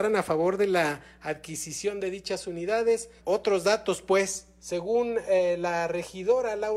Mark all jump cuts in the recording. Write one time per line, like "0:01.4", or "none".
0:03.2